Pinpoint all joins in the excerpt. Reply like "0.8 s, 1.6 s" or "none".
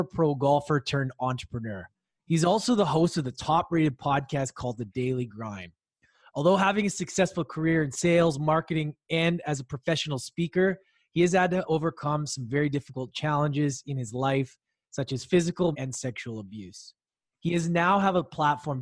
15.7 s